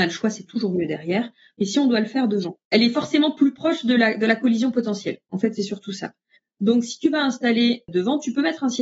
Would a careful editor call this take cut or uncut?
cut